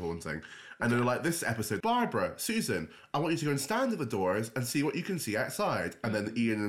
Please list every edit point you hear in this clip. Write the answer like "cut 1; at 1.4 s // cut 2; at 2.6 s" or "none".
cut 1; at 1.8 s